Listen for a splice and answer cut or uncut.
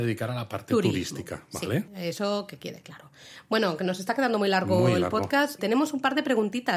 cut